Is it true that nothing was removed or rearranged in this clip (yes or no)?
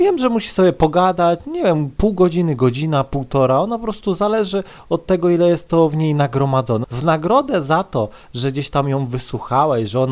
no